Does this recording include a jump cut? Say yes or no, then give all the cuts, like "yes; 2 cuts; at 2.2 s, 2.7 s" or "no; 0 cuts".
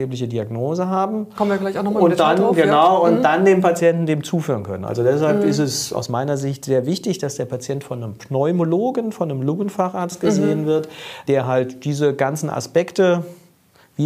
yes; 1 cut; at 11.3 s